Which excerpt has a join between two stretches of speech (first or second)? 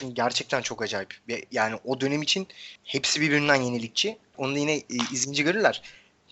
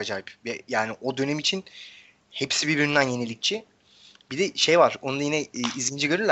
first